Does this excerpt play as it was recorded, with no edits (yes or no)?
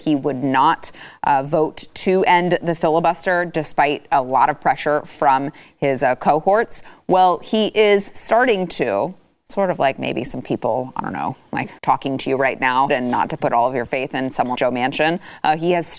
no